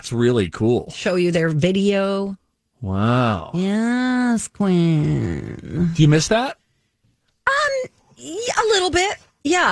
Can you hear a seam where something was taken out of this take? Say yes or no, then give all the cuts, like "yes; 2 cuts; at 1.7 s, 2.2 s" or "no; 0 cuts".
no; 0 cuts